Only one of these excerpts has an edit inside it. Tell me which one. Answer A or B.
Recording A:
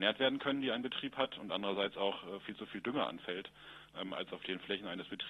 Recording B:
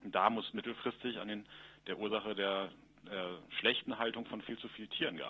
A